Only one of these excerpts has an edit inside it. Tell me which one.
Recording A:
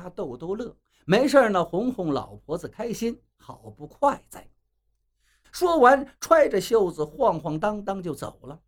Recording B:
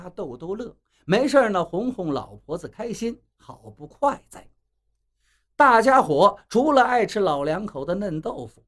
A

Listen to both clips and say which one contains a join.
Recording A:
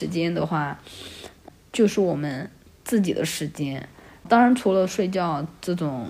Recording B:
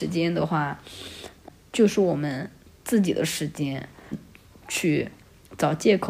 B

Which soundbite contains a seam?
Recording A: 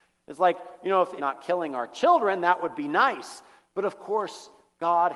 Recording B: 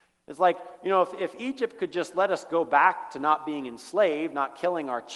A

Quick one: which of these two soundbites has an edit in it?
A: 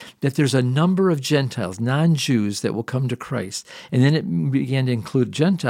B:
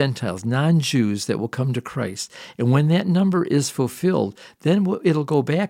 A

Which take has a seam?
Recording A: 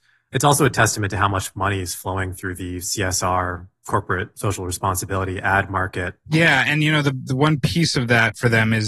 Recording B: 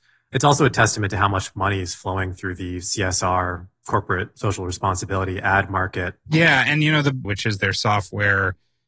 B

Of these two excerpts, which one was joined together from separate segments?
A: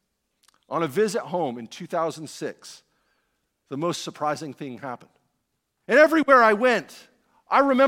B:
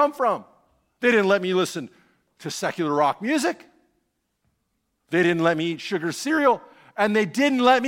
A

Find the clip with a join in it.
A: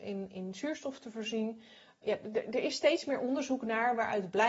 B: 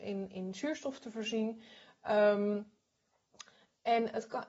A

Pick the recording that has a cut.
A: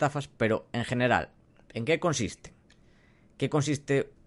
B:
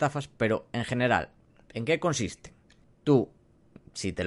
B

